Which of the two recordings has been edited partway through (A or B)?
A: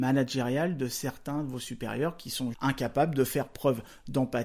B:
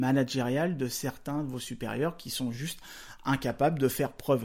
A